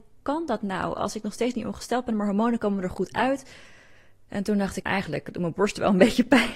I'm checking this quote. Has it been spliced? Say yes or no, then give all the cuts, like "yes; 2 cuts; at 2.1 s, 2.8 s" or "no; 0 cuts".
yes; 1 cut; at 4.8 s